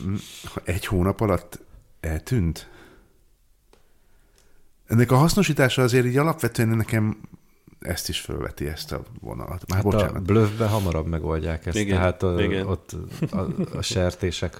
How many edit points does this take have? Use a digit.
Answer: 0